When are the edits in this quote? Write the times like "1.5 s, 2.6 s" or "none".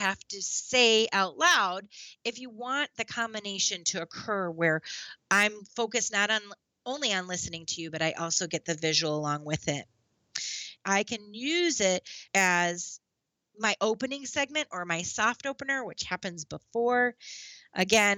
10.8 s, 12.3 s